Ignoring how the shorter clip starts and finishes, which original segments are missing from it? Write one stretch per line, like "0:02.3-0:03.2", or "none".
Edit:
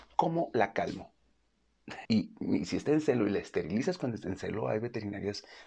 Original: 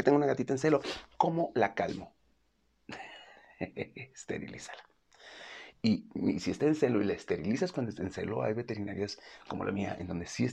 0:03.1-0:05.8

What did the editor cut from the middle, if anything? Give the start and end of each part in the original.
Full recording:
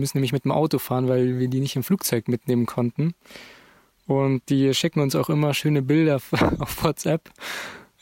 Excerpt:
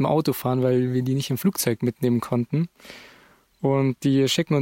none

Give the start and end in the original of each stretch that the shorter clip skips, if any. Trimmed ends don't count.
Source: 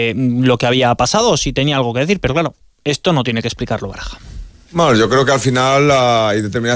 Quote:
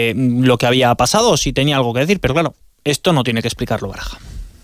none

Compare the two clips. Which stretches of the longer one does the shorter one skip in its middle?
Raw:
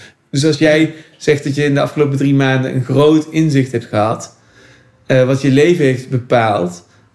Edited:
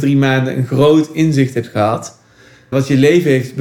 0:04.9-0:05.3

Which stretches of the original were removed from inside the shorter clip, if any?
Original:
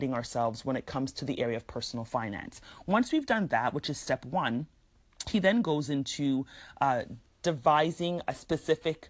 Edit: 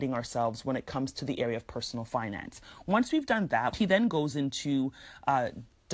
0:03.7-0:05.2

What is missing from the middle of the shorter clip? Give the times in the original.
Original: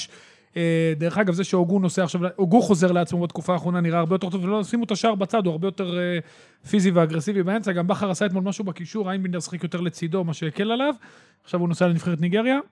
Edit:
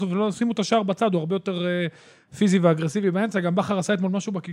none

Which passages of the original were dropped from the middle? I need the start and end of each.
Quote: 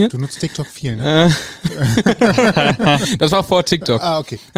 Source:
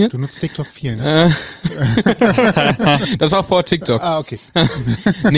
none

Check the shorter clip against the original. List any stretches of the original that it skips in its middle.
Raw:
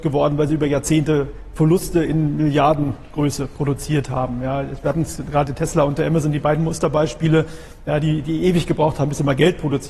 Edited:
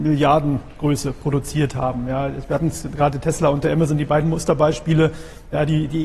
none

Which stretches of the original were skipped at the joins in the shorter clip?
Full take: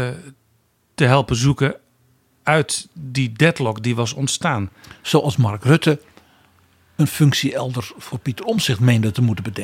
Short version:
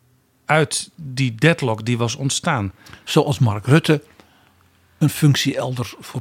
none

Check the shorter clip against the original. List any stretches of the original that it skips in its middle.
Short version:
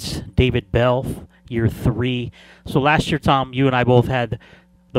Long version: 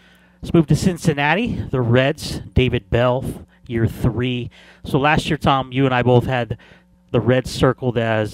none

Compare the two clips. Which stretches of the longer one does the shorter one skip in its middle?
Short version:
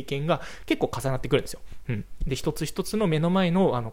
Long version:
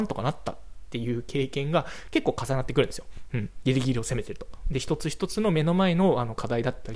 0:03.6-0:04.6

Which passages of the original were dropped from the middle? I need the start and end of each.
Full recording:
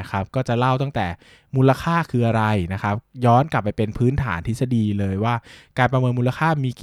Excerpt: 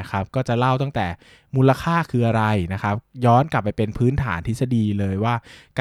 none

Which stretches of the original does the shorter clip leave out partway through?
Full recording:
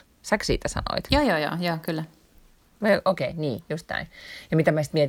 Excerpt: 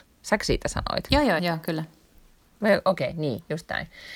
0:01.4-0:01.6

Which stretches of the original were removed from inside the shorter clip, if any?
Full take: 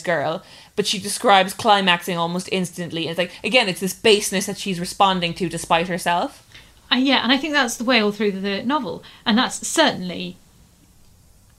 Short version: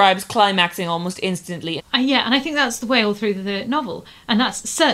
0:03.1-0:06.8

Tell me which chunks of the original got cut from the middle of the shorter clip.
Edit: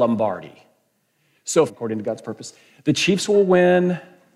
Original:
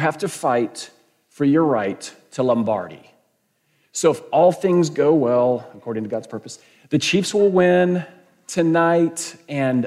0:04.1-0:05.7

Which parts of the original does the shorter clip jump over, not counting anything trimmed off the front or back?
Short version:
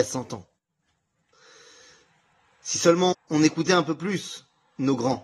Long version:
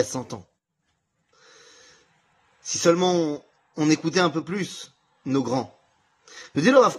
0:03.1-0:03.6

